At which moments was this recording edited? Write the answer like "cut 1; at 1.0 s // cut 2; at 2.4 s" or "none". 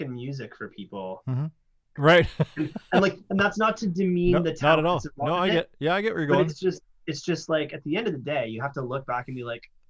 cut 1; at 2.0 s